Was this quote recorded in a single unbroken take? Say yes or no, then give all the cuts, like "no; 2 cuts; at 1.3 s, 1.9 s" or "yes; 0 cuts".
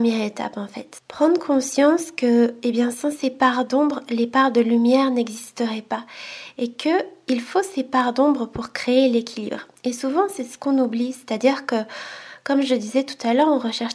yes; 0 cuts